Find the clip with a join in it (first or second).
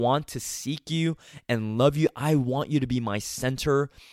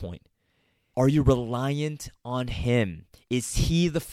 second